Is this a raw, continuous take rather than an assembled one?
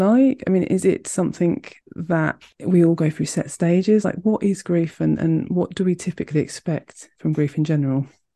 yes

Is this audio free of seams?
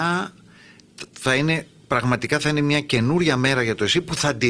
no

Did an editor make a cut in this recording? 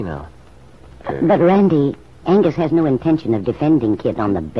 yes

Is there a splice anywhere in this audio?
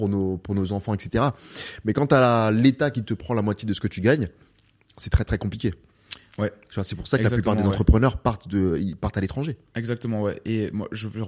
no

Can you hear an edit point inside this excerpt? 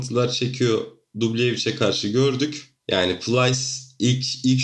no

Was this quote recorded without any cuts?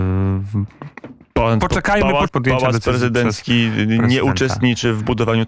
no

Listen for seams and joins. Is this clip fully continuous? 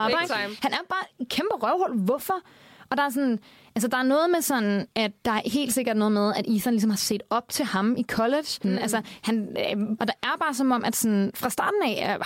no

